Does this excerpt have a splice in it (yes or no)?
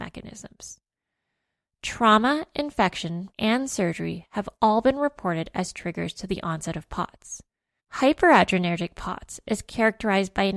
yes